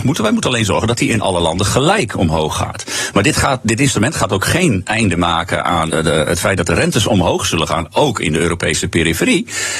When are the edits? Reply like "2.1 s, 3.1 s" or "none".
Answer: 5.9 s